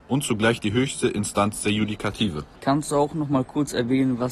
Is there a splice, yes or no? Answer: yes